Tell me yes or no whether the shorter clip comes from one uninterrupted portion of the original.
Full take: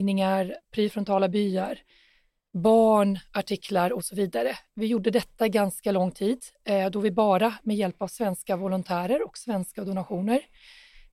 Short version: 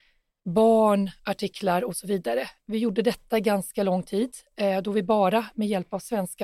yes